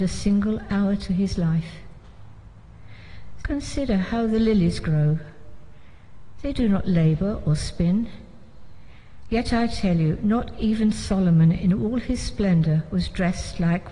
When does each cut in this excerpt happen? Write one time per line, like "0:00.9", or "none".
0:03.4